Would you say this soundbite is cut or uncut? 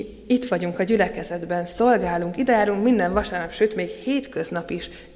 uncut